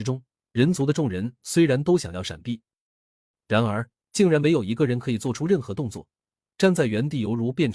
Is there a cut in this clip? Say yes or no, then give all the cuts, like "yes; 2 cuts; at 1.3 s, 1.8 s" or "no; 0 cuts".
no; 0 cuts